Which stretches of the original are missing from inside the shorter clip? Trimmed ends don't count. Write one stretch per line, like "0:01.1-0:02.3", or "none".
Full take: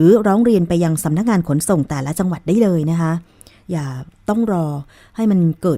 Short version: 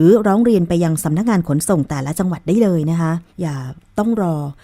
0:03.3-0:03.6